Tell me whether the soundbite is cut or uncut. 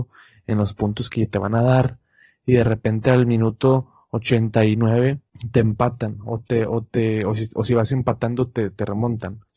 uncut